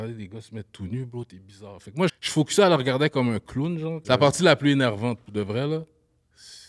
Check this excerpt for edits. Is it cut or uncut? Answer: cut